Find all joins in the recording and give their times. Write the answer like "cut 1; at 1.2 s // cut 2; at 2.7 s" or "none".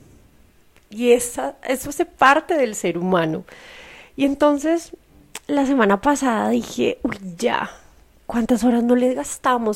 none